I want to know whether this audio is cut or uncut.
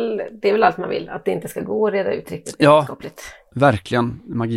uncut